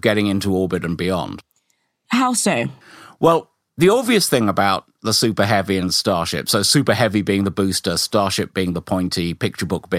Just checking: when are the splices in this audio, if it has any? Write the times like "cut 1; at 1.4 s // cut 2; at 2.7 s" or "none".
none